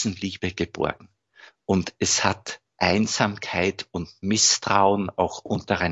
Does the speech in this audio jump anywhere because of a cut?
no; 0 cuts

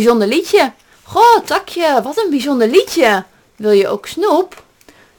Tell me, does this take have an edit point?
yes; 1 cut; at 0.9 s

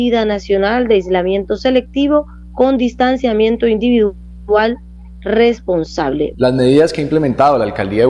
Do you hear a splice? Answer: yes; 1 cut; at 6.3 s

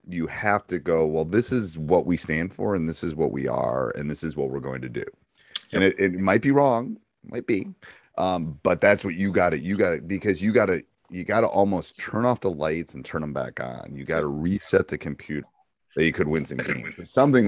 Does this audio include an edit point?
yes; 2 cuts; at 8.0 s, 15.4 s

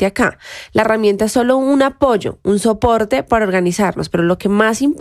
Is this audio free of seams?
yes; 0 cuts

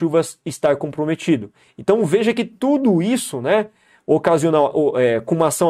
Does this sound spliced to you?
no; 0 cuts

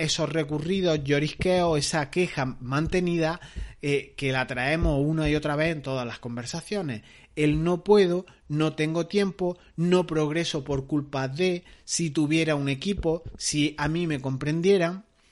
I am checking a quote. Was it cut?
no; 0 cuts

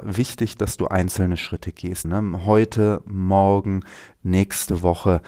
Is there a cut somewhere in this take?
yes; 2 cuts; at 2.0 s, 4.2 s

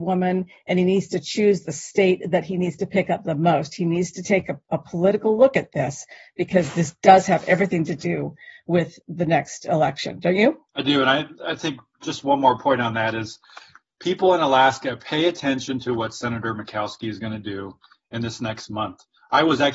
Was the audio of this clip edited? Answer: yes; 1 cut; at 10.7 s

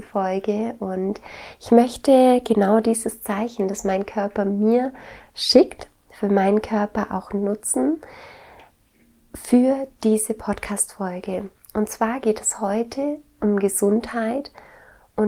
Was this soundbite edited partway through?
no; 0 cuts

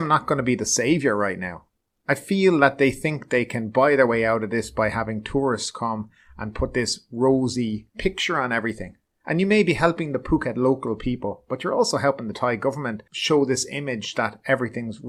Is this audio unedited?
no; 1 cut; at 9.1 s

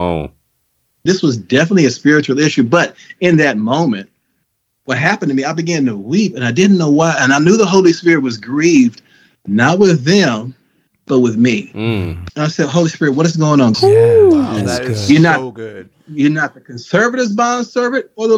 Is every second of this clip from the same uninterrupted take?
no; 3 cuts; at 1.1 s, 12.3 s, 13.7 s

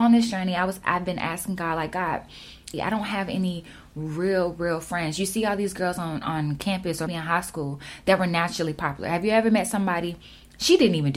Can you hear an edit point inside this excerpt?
yes; 2 cuts; at 2.7 s, 7.1 s

